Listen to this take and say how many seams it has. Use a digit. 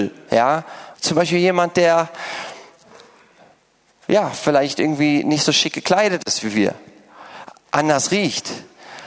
1